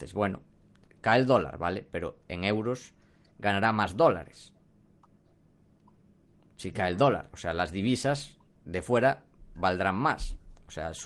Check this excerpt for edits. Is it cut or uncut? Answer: uncut